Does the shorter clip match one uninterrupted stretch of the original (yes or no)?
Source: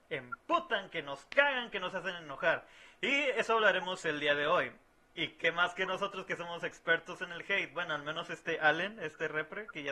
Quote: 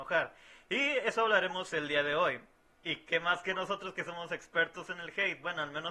yes